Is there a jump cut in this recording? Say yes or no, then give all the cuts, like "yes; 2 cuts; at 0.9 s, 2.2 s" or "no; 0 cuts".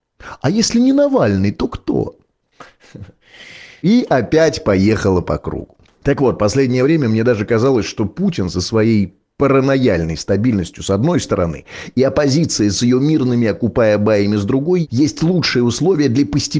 no; 0 cuts